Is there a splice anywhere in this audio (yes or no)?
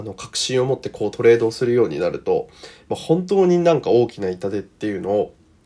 no